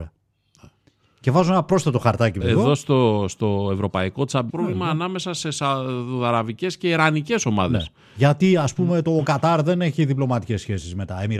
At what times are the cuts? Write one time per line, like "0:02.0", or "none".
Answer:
0:02.4
0:04.5